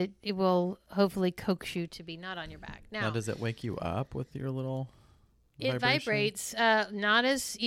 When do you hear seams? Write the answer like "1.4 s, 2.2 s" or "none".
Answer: none